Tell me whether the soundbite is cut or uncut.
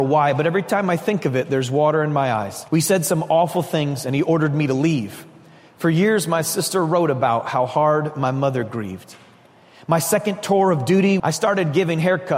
cut